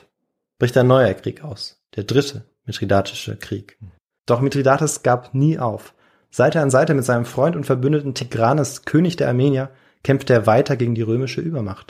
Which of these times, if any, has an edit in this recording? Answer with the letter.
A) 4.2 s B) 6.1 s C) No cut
A